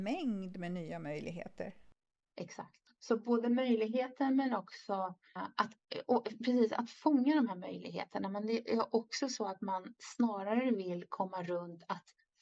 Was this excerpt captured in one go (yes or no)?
no